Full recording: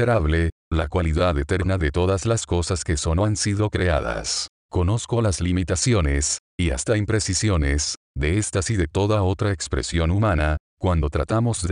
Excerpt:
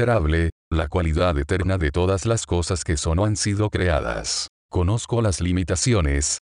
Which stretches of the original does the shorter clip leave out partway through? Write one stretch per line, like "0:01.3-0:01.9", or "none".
none